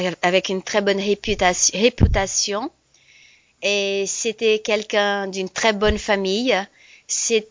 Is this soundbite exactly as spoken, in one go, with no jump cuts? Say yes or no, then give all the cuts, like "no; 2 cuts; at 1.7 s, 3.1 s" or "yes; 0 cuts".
yes; 0 cuts